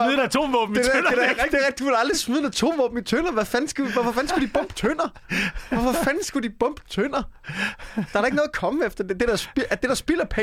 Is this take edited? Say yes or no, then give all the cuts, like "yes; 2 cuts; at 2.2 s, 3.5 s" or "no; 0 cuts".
no; 0 cuts